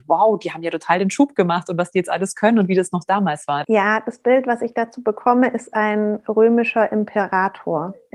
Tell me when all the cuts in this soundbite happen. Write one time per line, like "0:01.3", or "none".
0:03.6